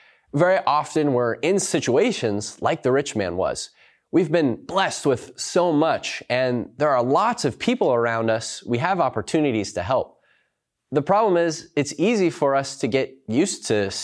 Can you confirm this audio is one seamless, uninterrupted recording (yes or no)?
yes